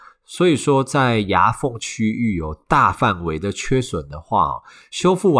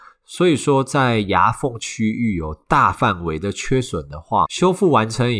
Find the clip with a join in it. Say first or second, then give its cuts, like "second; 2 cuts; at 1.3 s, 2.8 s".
second; 1 cut; at 4.4 s